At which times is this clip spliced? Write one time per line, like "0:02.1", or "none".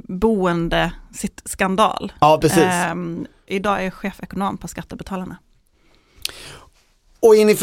0:03.5